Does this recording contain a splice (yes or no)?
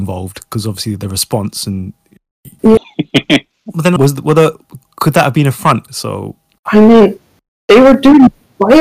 yes